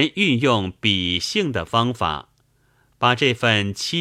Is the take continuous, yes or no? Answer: yes